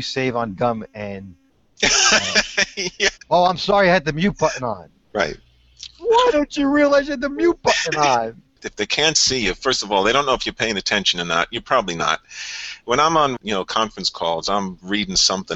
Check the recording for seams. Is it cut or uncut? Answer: cut